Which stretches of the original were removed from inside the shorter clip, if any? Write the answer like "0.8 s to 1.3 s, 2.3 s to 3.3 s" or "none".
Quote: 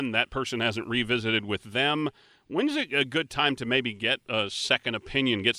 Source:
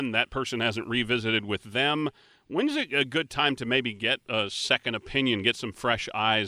none